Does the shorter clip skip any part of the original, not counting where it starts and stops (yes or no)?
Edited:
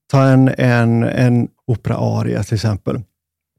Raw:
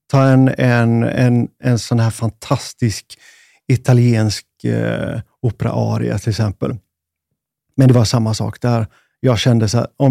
yes